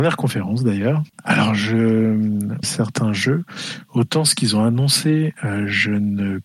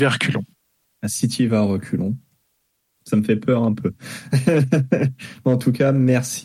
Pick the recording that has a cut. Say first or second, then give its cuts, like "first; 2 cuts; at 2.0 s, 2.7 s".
first; 2 cuts; at 1.1 s, 2.6 s